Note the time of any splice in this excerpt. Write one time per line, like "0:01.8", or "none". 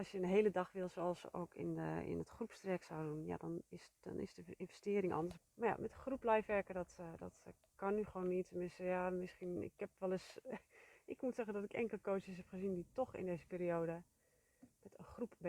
0:05.4